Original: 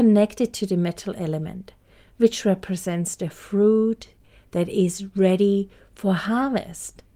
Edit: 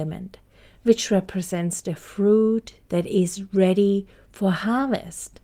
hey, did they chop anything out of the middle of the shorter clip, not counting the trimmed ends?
yes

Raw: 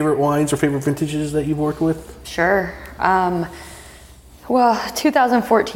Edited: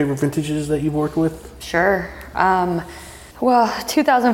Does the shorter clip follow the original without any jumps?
no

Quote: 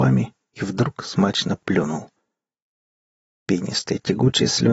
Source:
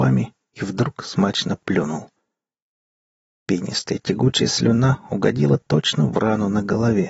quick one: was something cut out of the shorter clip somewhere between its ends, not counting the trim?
no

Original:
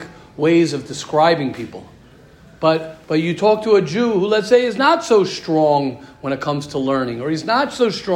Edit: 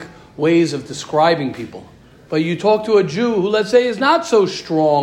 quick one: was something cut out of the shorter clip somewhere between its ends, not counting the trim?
yes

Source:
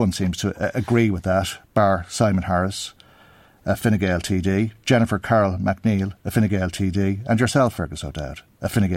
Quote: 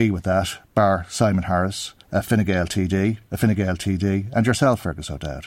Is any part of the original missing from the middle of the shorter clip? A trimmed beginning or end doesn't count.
yes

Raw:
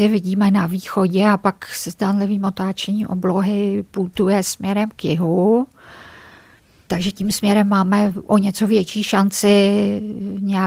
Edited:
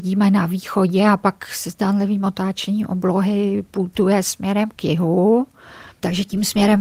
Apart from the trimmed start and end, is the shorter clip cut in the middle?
yes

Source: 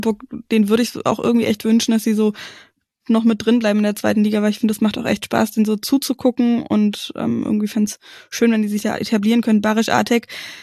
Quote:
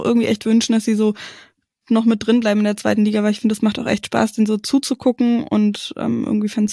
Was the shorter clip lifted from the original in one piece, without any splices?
yes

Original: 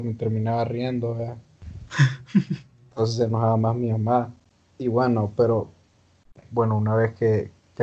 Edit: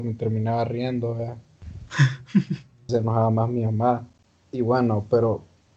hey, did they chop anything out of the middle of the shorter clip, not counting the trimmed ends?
yes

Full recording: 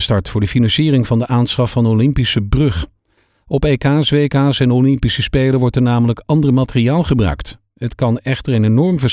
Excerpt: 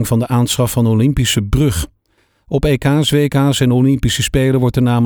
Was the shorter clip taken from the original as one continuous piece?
yes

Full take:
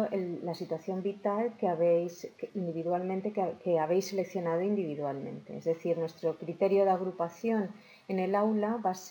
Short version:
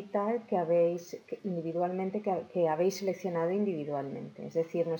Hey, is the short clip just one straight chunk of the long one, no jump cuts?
yes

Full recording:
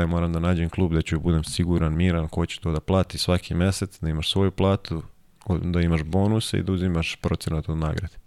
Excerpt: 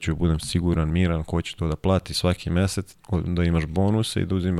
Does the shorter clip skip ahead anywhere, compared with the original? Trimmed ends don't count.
yes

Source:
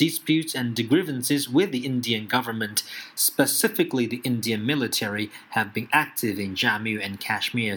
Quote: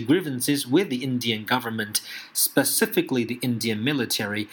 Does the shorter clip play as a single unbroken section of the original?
yes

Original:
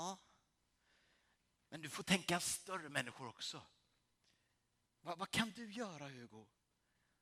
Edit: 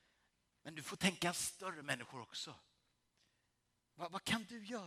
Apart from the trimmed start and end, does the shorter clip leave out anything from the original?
no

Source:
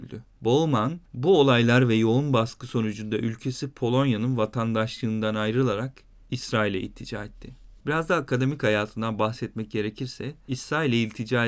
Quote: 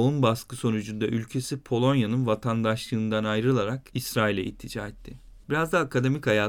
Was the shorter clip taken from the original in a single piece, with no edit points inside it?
no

